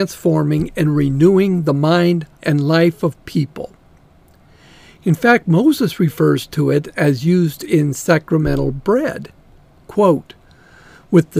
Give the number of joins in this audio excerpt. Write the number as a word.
one